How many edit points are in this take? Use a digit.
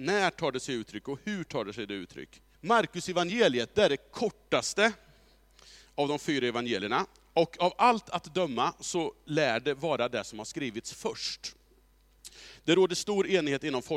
1